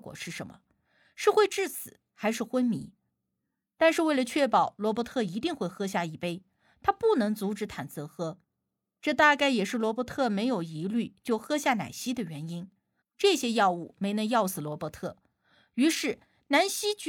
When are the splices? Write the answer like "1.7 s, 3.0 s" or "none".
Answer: 13.0 s